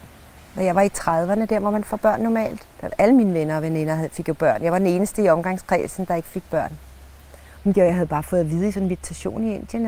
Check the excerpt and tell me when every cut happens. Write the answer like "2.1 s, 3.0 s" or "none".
2.7 s, 7.6 s